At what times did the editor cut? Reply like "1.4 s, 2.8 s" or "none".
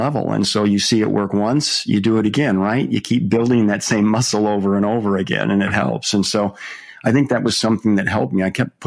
none